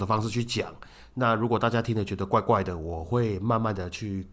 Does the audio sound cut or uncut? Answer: uncut